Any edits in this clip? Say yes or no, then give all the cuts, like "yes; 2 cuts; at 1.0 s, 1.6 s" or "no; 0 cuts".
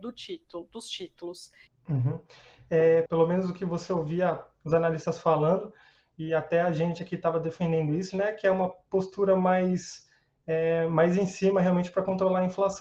yes; 3 cuts; at 1.7 s, 3.1 s, 8.1 s